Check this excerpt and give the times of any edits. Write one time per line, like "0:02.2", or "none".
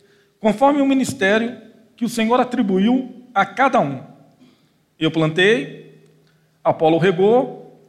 none

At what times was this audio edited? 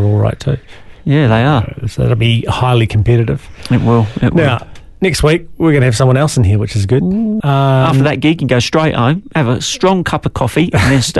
0:07.4

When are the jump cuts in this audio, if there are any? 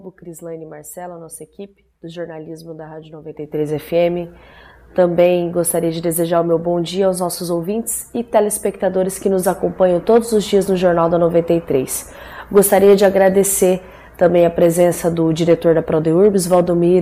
0:01.9

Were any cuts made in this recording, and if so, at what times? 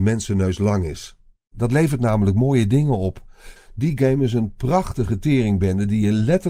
0:03.6

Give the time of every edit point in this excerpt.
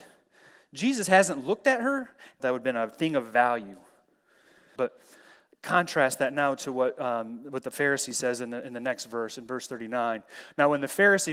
0:02.4
0:04.8

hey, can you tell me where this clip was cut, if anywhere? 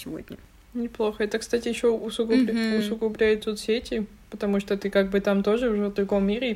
none

